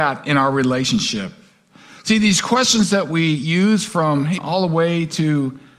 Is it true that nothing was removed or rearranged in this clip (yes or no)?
no